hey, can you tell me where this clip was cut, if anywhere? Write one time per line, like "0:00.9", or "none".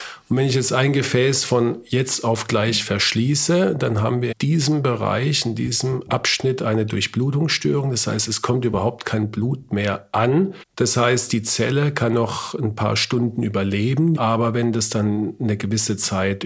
0:04.3
0:10.6
0:14.2